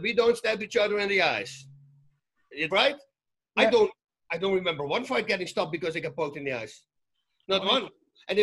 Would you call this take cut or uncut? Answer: cut